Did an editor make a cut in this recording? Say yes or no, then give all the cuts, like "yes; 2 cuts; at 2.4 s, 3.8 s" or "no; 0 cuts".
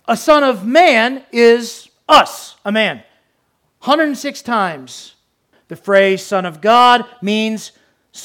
yes; 1 cut; at 5.5 s